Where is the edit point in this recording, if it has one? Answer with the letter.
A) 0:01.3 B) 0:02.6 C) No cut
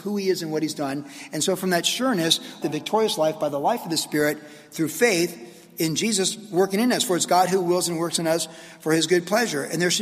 B